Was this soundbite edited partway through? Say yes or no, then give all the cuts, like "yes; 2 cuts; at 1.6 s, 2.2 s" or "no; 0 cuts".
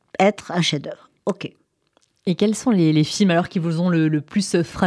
no; 0 cuts